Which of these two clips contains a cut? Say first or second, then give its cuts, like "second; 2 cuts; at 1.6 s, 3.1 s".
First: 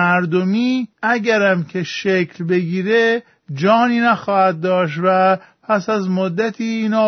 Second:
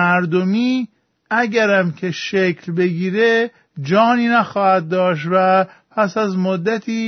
first; 1 cut; at 0.9 s